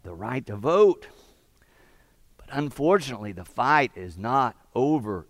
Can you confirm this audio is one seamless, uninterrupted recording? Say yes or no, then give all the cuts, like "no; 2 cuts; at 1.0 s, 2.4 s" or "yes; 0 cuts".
yes; 0 cuts